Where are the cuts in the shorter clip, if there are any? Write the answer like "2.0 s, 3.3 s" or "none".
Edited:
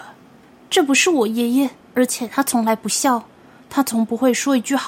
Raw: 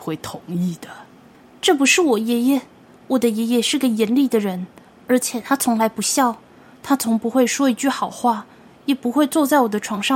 1.8 s